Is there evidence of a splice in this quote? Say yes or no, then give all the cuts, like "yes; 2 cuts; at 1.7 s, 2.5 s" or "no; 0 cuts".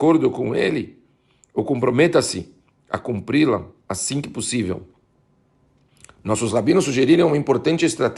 no; 0 cuts